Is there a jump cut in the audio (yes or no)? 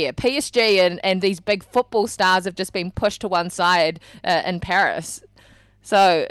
no